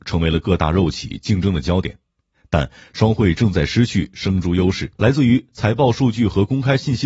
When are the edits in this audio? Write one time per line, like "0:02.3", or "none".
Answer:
0:05.0